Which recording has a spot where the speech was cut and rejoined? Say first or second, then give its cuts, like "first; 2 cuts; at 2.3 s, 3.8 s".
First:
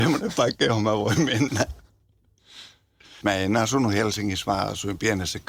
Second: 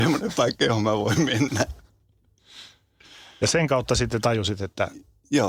first; 1 cut; at 3.2 s